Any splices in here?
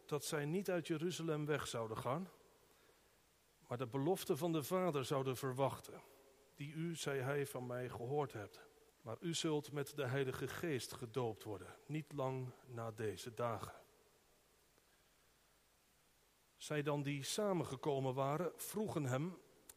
yes; 1 cut; at 8.9 s

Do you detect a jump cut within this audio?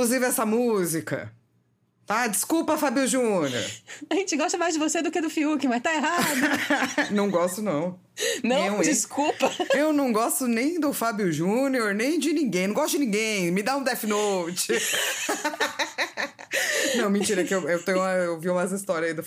no; 0 cuts

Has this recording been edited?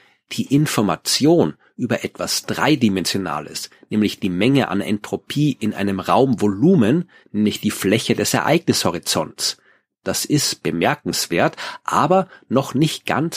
yes; 1 cut; at 7.2 s

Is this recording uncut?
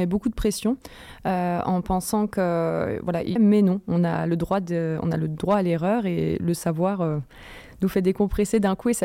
no; 1 cut; at 3.4 s

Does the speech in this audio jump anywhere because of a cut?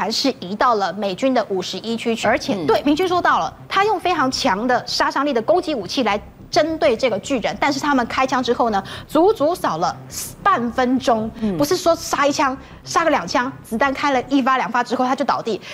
yes; 1 cut; at 2.2 s

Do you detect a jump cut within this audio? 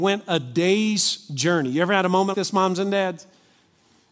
yes; 1 cut; at 2.3 s

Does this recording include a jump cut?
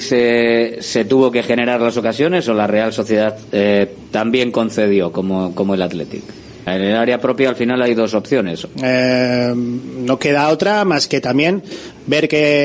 yes; 2 cuts; at 6.7 s, 8.7 s

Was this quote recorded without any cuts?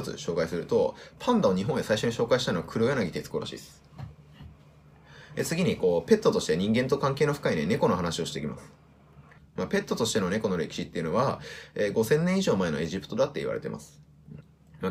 yes; 0 cuts

